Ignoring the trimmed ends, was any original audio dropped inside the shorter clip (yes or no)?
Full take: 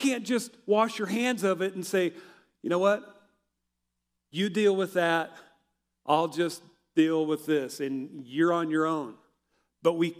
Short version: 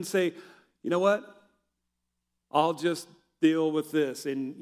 yes